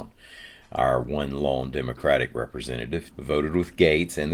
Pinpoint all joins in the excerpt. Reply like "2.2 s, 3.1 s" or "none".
3.1 s